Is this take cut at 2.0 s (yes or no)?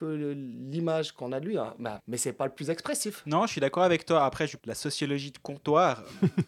yes